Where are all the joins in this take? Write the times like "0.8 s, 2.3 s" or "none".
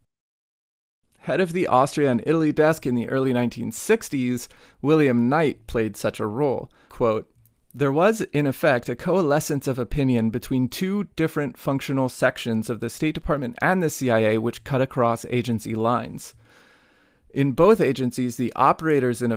6.9 s